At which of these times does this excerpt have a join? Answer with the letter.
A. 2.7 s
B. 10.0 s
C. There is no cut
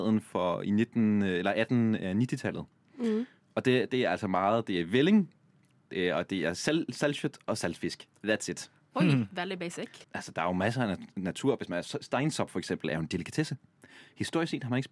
B